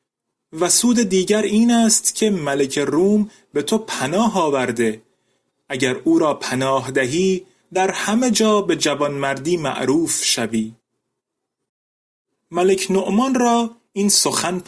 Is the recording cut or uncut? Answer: uncut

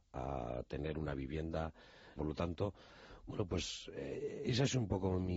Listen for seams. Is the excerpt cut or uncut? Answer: cut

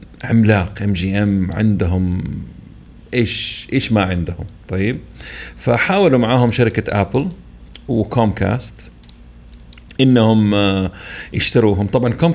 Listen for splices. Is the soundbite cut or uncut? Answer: uncut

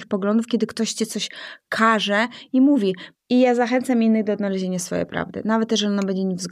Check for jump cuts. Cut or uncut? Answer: cut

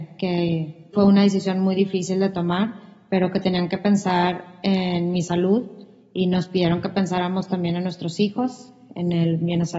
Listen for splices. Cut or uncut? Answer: cut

